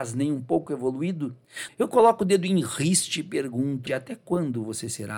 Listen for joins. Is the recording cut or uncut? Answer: cut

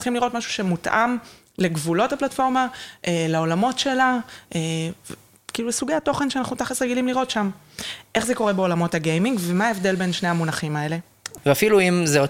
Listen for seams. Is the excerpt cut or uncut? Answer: cut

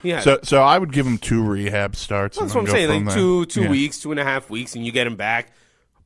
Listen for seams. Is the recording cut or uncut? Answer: uncut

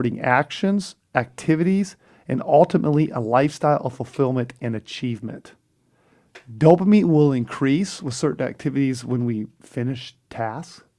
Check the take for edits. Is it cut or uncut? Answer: uncut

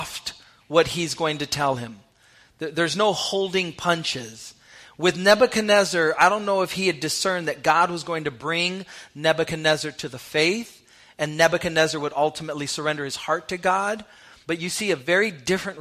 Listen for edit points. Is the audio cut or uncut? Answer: cut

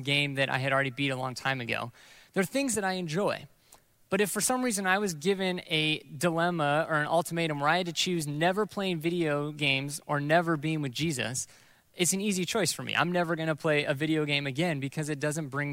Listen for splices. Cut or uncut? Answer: uncut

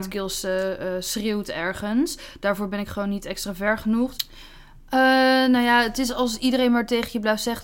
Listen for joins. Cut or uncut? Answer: cut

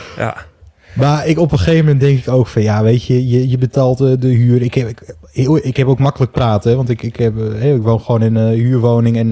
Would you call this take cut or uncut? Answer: uncut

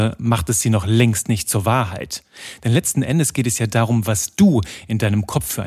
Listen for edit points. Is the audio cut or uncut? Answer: uncut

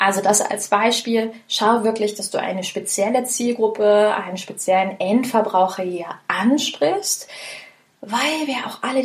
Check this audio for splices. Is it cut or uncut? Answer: uncut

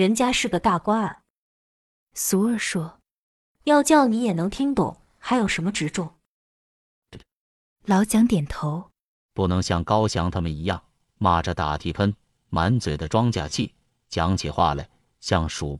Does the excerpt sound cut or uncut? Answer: cut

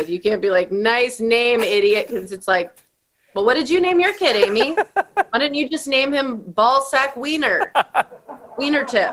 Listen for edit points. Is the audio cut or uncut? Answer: uncut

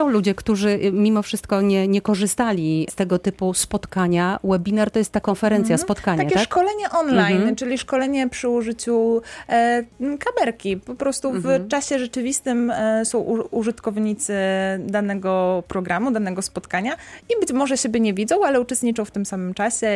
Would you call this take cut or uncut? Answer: uncut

